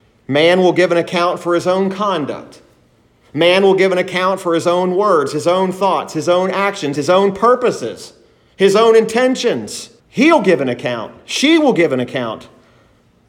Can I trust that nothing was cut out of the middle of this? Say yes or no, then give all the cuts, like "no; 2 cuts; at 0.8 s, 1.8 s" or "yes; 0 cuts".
no; 2 cuts; at 6.9 s, 10.0 s